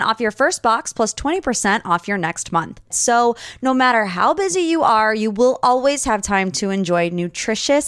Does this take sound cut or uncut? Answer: cut